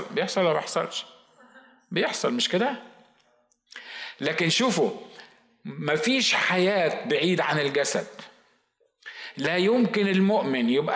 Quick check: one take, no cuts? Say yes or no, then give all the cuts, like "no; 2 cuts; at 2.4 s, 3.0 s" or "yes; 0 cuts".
yes; 0 cuts